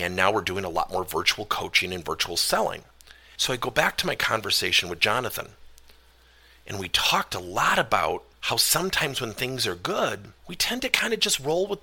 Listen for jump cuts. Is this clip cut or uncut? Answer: cut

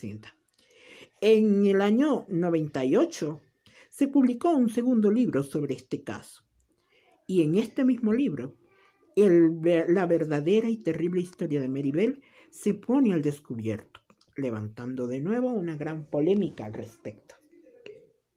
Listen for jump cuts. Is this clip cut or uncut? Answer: uncut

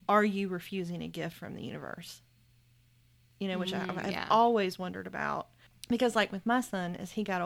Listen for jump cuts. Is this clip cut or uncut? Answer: uncut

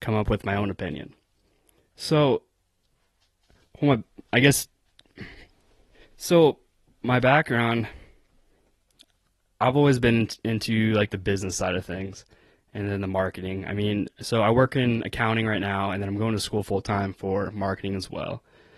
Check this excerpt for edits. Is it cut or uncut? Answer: uncut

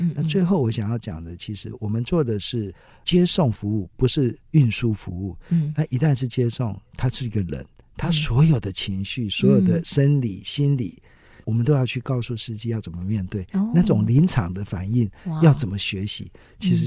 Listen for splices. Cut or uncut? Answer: uncut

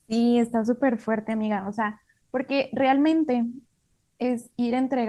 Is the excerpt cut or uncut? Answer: uncut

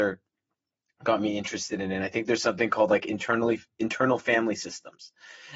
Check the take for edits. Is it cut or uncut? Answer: uncut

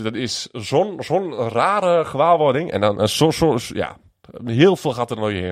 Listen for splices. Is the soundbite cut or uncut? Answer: uncut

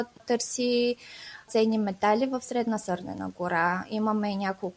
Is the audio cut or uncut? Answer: uncut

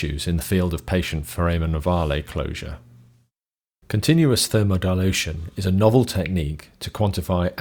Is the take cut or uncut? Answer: cut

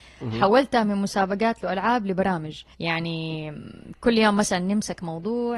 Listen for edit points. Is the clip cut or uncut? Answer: cut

